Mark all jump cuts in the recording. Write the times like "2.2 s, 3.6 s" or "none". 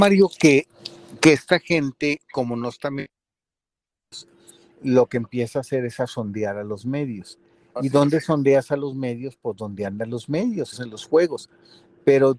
10.7 s